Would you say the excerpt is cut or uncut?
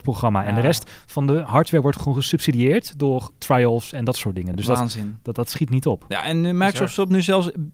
uncut